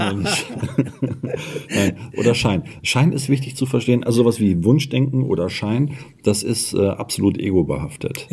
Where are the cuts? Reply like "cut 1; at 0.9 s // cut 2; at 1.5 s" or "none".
none